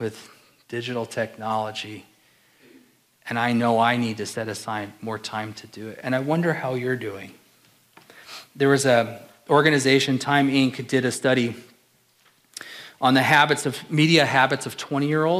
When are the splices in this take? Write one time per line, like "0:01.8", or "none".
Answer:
none